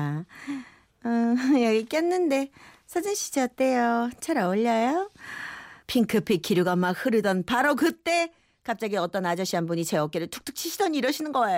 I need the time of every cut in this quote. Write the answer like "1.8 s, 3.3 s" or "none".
5.8 s